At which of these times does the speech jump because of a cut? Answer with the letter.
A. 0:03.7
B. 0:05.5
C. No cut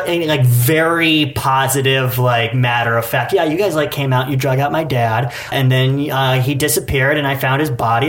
B